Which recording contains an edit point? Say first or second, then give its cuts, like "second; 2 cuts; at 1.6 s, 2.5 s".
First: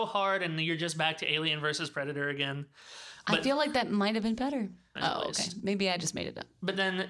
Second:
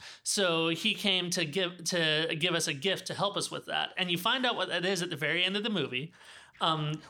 first; 1 cut; at 5.0 s